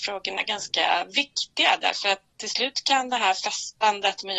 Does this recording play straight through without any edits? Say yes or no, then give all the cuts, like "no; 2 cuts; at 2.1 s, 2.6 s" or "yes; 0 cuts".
no; 1 cut; at 2.3 s